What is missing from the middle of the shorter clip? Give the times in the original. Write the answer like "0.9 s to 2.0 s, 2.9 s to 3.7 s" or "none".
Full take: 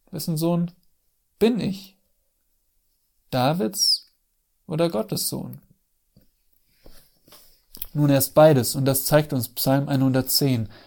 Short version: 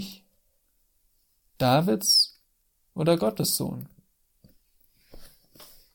none